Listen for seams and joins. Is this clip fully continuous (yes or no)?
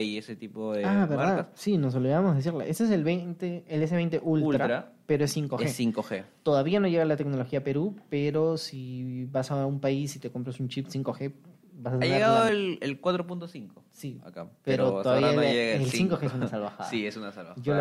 yes